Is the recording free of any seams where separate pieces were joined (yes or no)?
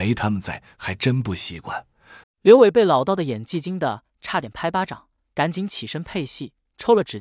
no